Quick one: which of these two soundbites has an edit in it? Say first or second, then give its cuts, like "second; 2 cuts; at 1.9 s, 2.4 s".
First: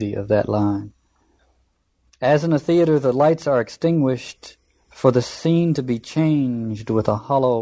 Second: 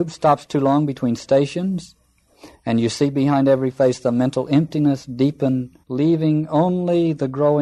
second; 2 cuts; at 2.5 s, 5.8 s